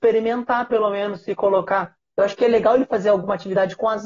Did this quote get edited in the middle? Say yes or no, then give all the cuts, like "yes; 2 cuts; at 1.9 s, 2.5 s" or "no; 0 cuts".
yes; 1 cut; at 2.1 s